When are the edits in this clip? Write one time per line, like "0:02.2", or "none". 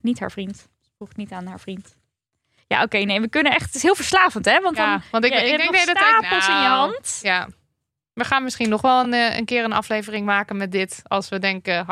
none

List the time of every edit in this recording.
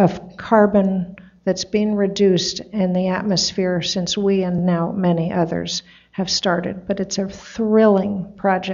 none

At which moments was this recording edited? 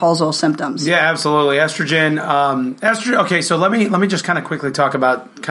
none

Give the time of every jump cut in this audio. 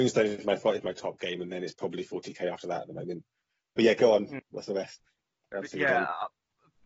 none

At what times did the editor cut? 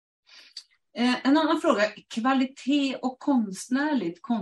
none

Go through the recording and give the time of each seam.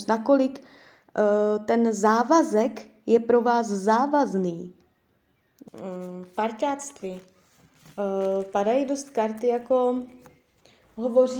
0:05.7

